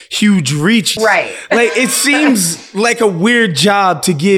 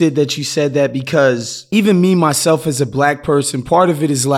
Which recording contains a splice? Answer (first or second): first